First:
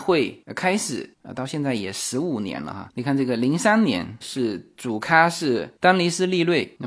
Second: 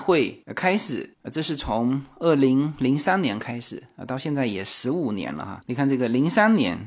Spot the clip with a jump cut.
first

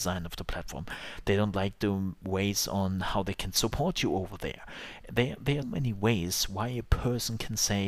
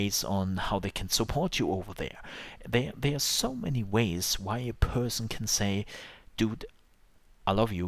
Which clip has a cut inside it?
first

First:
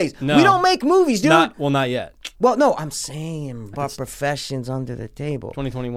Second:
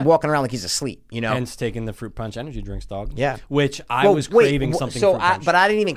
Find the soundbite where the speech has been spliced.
first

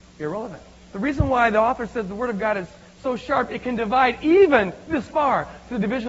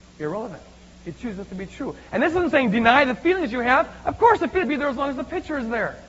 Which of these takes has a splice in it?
first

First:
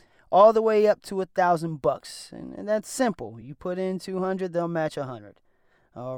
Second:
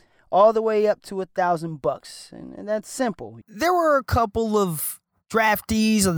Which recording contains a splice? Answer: second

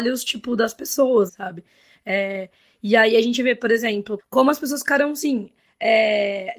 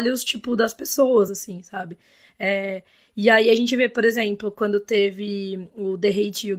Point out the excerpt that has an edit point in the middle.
first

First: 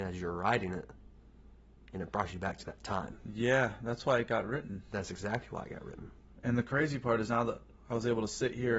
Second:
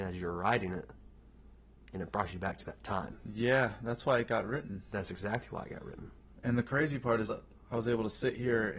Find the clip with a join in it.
second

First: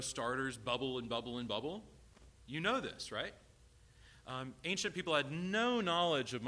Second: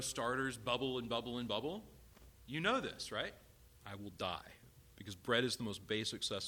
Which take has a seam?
second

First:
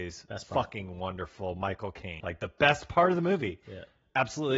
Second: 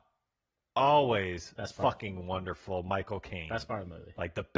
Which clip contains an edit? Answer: first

